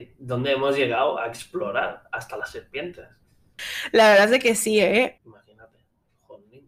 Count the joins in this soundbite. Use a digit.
2